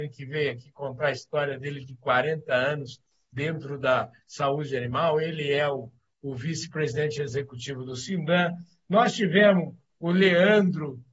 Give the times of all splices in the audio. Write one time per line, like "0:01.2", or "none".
none